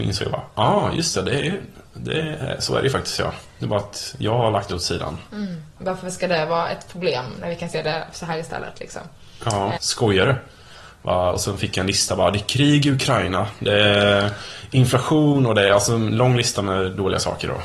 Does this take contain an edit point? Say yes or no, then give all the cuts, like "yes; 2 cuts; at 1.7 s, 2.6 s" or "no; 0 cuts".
yes; 2 cuts; at 5.8 s, 9.8 s